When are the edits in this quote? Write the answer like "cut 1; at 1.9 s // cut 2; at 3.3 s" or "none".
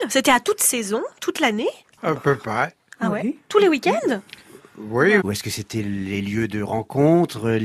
cut 1; at 5.2 s